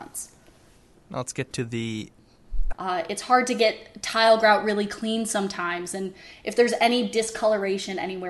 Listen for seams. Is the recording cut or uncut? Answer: cut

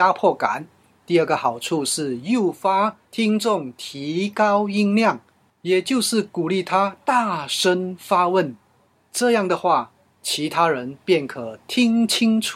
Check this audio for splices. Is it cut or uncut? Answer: uncut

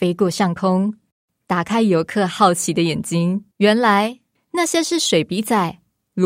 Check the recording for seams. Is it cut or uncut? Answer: cut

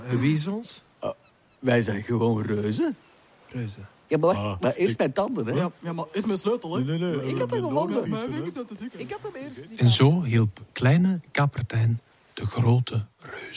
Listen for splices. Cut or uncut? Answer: cut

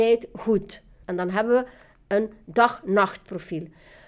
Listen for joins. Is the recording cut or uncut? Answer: cut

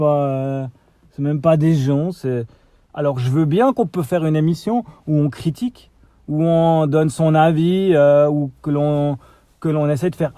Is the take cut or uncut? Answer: cut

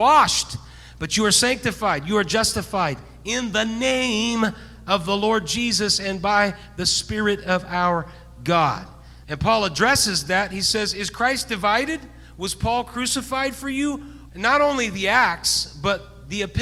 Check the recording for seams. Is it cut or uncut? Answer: cut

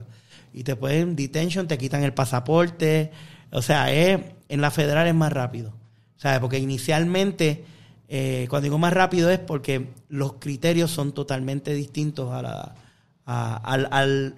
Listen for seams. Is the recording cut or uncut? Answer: uncut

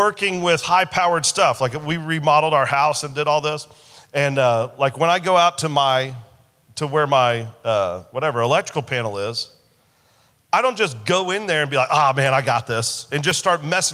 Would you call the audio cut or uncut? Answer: uncut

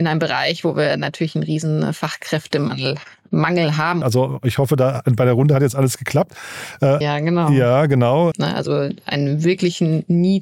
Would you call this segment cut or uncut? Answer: cut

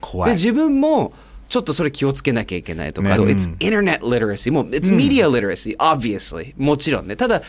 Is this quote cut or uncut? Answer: cut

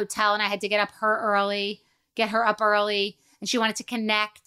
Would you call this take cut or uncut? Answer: uncut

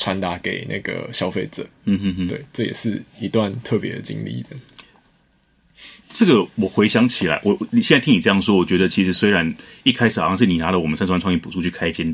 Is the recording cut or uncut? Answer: cut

